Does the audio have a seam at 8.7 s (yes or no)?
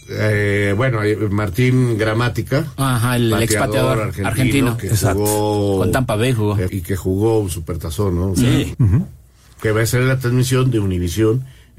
yes